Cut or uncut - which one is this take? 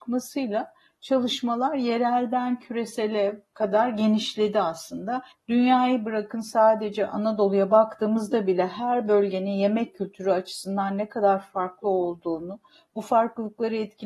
cut